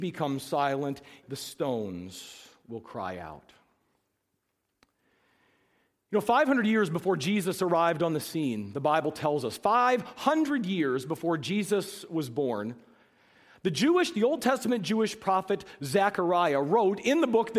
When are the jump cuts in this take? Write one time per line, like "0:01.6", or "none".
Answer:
0:01.2